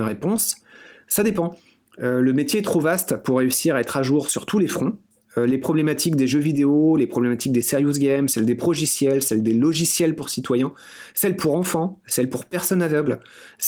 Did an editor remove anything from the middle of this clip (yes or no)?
no